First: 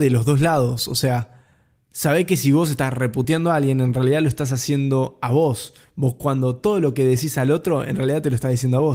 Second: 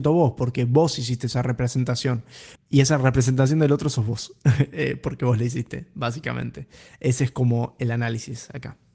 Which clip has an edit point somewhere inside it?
second; 1 cut; at 2.6 s

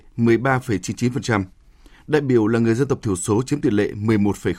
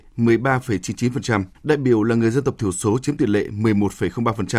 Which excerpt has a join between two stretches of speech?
second; 1 cut; at 1.5 s

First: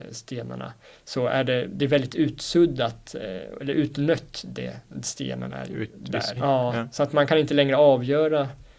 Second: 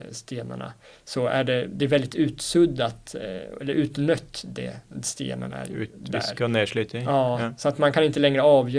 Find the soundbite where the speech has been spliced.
first; 1 cut; at 6.4 s

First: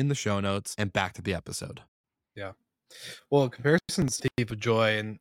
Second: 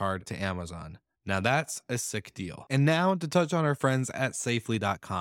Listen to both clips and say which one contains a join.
first; 1 cut; at 4.2 s

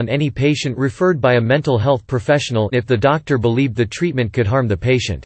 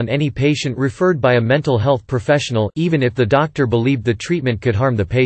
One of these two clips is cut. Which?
first; 1 cut; at 2.7 s

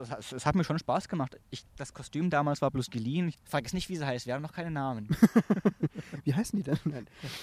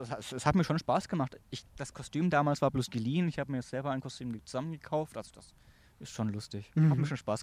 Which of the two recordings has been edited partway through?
first; 1 cut; at 3.3 s

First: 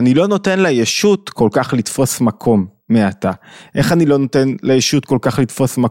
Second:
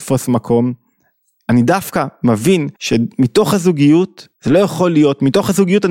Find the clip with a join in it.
second; 2 cuts; at 2.7 s, 4.3 s

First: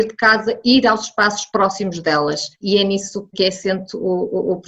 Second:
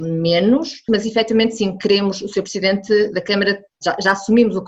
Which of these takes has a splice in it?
first; 1 cut; at 2.5 s

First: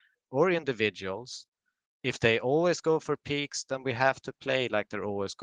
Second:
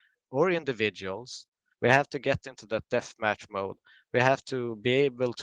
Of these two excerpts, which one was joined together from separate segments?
second; 1 cut; at 1.7 s

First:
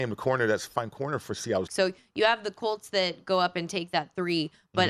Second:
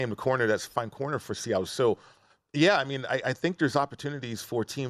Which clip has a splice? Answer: first; 1 cut; at 1.7 s

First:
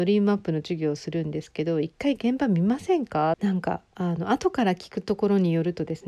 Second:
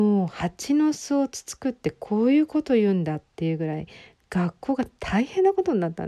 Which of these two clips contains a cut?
first; 1 cut; at 3.3 s

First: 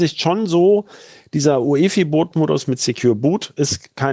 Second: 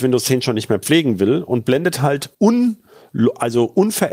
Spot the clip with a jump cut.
second; 1 cut; at 2.3 s

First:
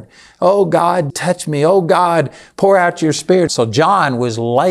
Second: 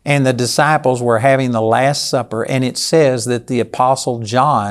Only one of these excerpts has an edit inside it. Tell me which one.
first; 2 cuts; at 1.1 s, 3.5 s

